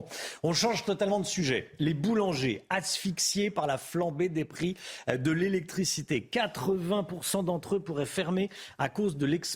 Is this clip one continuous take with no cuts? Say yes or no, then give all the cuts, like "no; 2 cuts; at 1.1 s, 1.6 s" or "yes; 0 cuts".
yes; 0 cuts